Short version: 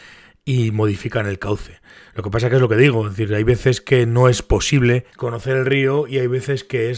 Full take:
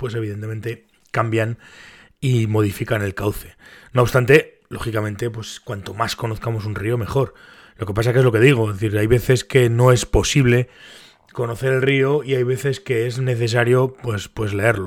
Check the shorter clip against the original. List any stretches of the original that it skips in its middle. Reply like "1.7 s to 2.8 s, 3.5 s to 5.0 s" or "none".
3.8 s to 7.7 s, 10.7 s to 11.3 s